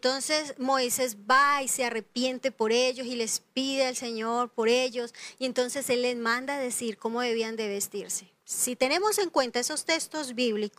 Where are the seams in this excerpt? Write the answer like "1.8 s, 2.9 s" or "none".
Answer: 8.4 s